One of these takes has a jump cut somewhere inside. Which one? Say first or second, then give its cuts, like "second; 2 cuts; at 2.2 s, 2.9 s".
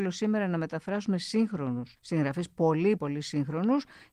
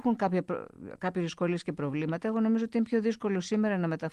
first; 2 cuts; at 2.0 s, 3.0 s